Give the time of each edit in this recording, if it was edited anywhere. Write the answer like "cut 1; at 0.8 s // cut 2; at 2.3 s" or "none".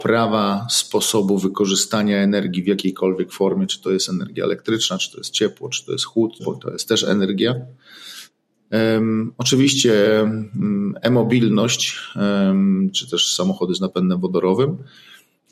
cut 1; at 6.4 s // cut 2; at 12.9 s